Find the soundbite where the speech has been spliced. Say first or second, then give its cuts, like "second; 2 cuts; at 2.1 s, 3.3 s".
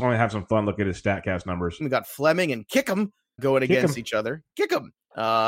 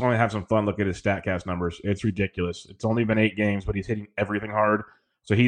first; 2 cuts; at 1.8 s, 3.4 s